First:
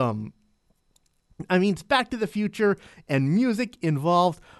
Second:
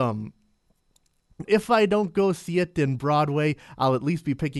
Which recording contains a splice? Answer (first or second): second